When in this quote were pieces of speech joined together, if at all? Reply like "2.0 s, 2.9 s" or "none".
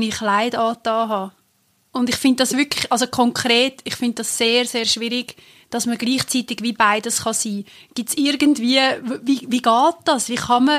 none

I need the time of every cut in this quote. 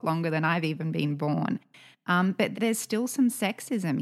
2.5 s

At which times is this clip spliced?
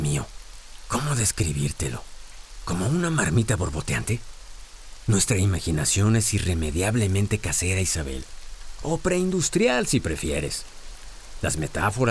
none

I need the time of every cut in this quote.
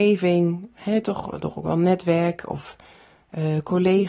none

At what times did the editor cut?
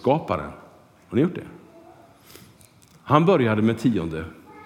none

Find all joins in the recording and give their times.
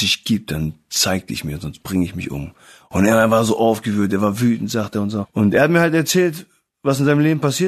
5.2 s

